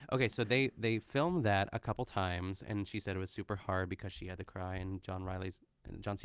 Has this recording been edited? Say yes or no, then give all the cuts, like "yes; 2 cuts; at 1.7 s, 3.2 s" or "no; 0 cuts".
no; 0 cuts